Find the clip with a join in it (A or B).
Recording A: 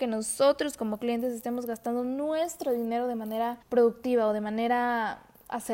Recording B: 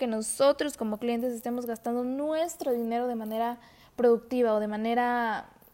A